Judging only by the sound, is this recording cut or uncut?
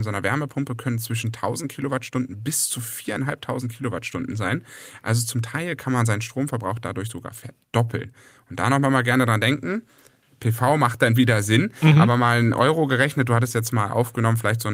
uncut